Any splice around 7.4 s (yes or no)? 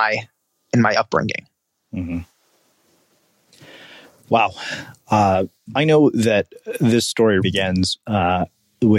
yes